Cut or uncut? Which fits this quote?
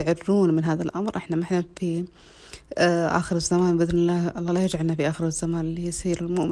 uncut